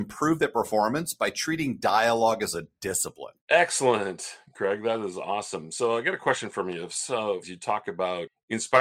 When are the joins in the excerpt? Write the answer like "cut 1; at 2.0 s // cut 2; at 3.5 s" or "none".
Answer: cut 1; at 3.4 s // cut 2; at 7.4 s